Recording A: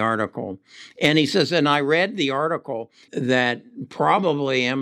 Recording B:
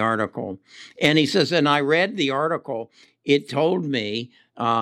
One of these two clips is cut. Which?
A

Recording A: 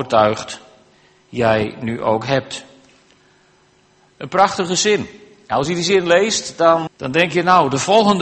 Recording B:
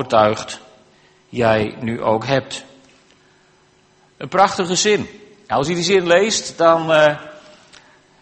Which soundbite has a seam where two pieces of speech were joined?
A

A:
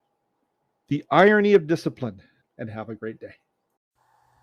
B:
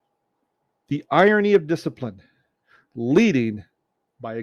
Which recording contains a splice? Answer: A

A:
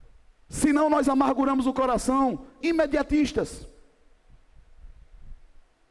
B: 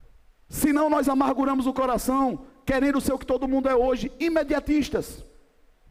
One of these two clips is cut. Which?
A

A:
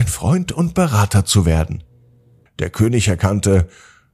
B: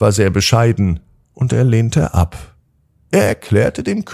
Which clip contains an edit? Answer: A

